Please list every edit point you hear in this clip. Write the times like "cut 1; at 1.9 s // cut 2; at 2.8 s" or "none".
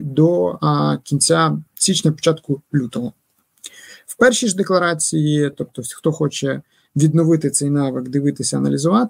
none